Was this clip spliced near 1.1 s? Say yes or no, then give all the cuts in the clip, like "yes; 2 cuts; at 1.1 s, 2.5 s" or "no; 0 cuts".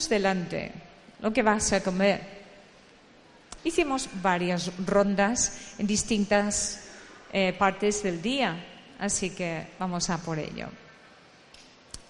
no; 1 cut; at 3.6 s